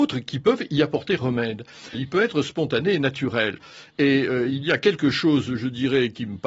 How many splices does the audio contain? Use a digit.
1